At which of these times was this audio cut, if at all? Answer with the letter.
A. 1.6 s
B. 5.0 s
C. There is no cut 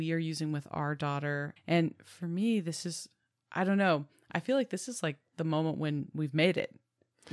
A